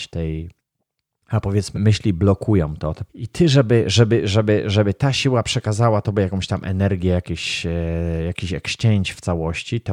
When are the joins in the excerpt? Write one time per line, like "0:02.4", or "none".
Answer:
0:01.7
0:03.1